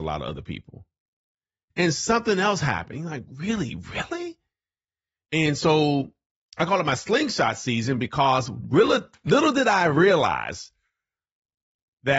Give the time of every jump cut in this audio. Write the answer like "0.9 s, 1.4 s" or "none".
1.7 s